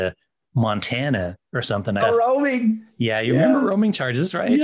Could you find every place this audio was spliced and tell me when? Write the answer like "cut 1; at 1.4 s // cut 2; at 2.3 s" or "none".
cut 1; at 2.0 s